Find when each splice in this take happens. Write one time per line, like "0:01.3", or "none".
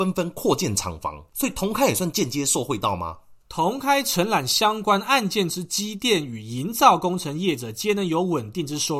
0:03.4